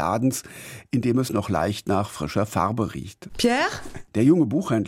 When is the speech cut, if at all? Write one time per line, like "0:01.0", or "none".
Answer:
0:03.3